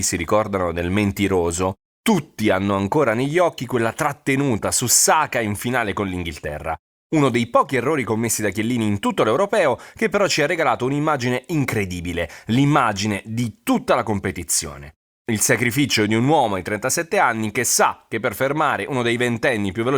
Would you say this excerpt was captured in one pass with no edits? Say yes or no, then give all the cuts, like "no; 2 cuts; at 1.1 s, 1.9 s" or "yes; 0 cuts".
yes; 0 cuts